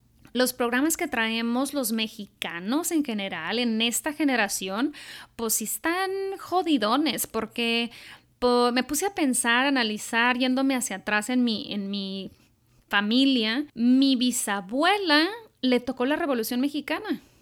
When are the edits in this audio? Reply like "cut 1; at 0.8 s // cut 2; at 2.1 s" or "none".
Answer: cut 1; at 13.7 s